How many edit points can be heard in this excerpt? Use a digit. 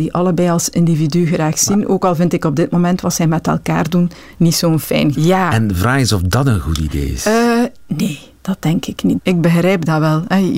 2